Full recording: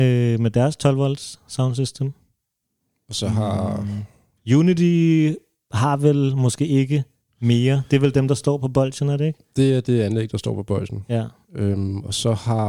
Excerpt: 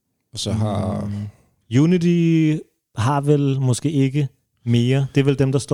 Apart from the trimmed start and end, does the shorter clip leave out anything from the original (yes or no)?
no